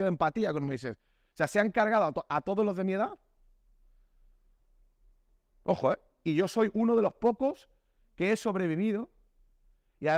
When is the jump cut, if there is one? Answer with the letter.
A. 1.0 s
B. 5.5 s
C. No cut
C